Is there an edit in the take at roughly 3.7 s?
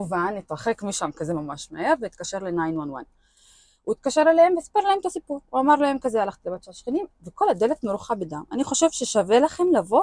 no; 0 cuts

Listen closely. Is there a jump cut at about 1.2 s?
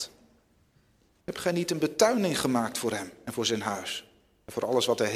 yes; 1 cut; at 1.2 s

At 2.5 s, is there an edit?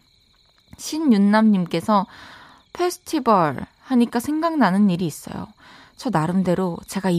no; 0 cuts

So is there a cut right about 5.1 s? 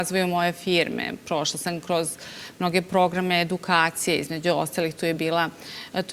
no; 0 cuts

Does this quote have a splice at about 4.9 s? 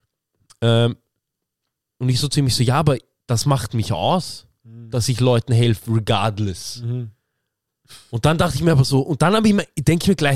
no; 1 cut; at 1.9 s

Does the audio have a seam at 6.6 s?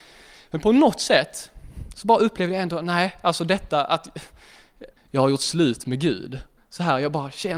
yes; 2 cuts; at 5.0 s, 6.6 s

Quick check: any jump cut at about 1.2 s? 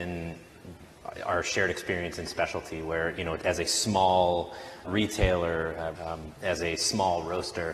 no; 2 cuts; at 4.8 s, 6.0 s

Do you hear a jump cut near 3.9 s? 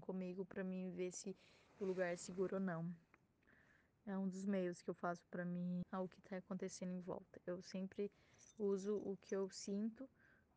no; 1 cut; at 5.8 s

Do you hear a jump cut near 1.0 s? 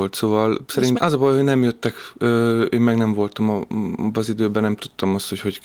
yes; 1 cut; at 1.0 s

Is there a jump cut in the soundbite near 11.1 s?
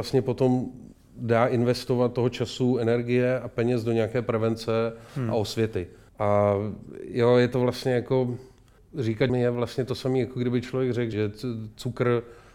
yes; 3 cuts; at 6.1 s, 9.3 s, 11.1 s

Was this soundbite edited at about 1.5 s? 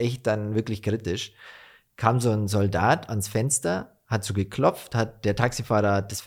no; 0 cuts

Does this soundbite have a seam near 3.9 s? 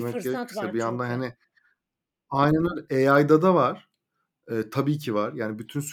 no; 0 cuts

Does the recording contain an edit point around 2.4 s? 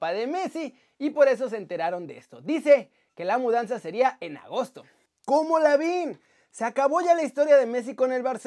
no; 0 cuts

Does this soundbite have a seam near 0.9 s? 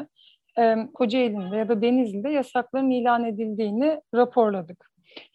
yes; 1 cut; at 0.9 s

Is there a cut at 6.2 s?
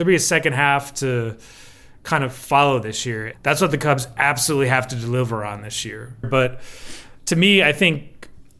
yes; 2 cuts; at 3.3 s, 6.2 s

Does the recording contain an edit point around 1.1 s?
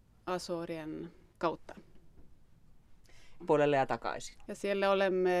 no; 2 cuts; at 3.4 s, 4.5 s

